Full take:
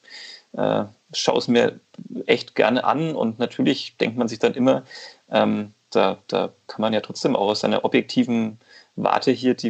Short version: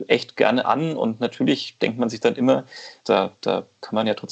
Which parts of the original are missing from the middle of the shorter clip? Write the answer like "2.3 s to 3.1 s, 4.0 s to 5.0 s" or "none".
5.2 s to 5.8 s

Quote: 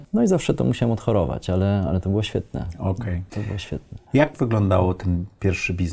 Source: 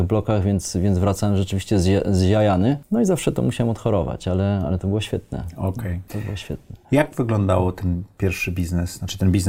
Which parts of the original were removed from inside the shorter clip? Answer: none

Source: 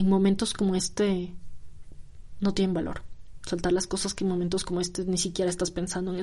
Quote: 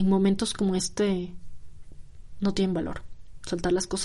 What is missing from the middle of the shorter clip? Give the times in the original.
none

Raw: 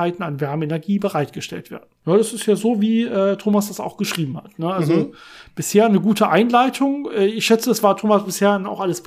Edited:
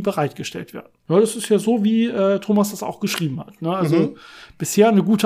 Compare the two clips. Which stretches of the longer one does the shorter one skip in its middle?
none

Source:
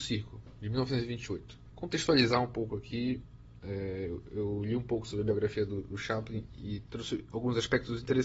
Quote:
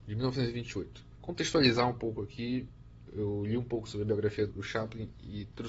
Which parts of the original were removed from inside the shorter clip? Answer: 3.6 s to 4.2 s, 5.7 s to 5.8 s

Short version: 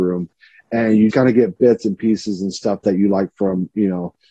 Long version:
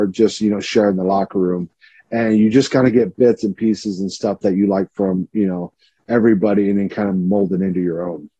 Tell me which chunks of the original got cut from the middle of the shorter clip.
2.5 s to 2.7 s

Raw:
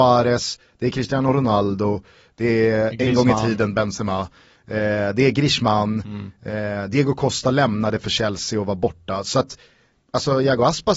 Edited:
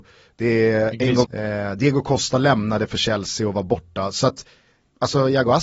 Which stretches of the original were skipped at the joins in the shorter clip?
3.2 s to 6.4 s

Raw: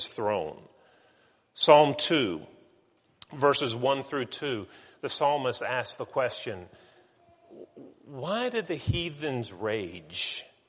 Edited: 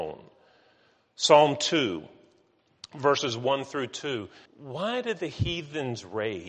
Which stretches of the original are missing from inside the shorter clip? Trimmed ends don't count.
4.8 s to 7.9 s

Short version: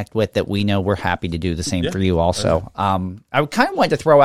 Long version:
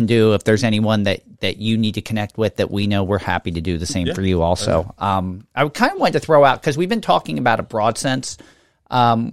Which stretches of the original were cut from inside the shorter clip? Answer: none

